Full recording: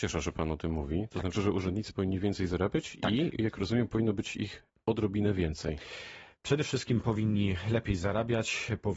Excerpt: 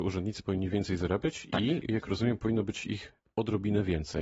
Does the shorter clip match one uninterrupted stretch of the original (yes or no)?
yes